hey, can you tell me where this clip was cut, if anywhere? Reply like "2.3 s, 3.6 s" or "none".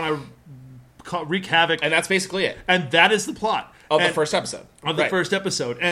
none